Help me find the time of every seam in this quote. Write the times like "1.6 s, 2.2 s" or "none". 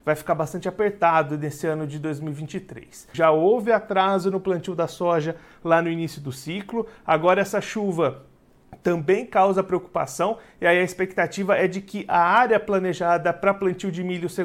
3.1 s